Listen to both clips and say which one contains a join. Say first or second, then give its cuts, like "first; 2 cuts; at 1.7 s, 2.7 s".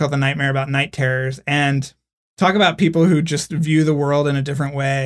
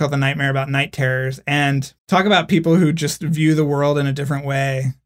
second; 1 cut; at 2.0 s